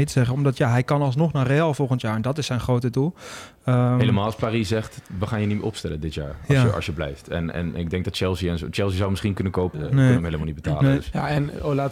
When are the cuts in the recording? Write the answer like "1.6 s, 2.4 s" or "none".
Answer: 9.7 s